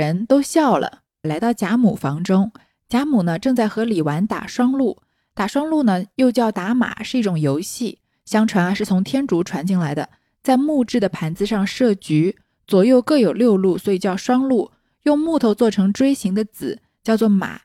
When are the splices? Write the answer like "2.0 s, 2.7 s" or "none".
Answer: 1.2 s